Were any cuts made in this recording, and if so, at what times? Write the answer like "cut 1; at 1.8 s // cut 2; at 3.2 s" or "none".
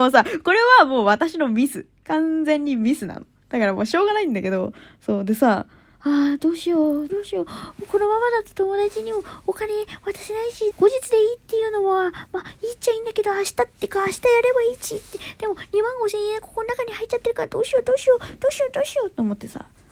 cut 1; at 7.1 s // cut 2; at 10.7 s